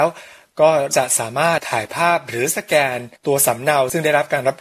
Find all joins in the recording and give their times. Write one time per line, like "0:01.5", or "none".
0:01.6
0:03.2